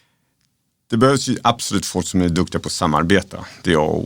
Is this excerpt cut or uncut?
uncut